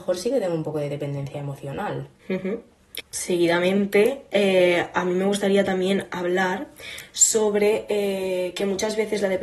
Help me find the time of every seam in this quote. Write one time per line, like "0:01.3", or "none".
none